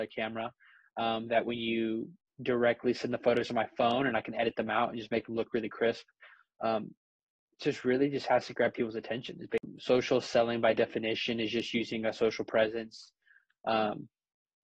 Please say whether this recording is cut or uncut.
uncut